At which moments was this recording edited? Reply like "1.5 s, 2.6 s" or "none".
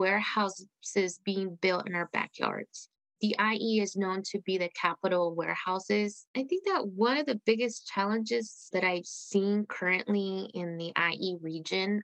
6.3 s, 8.7 s

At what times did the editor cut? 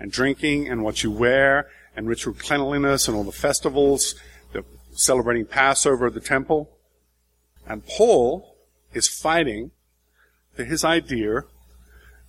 7.6 s

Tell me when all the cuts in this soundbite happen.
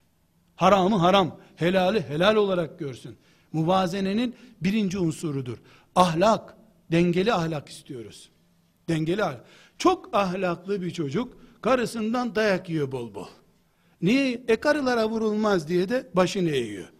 none

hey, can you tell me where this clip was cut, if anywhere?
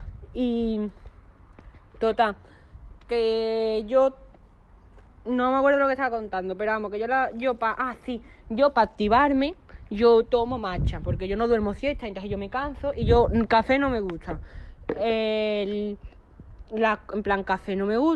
none

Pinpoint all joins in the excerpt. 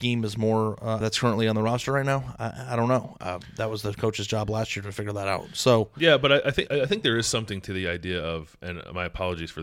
1.0 s, 6.7 s

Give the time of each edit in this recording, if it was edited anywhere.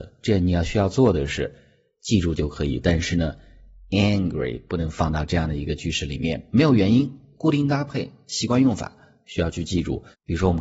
none

